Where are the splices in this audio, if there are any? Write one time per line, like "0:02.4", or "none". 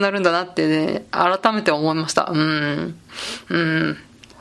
0:03.5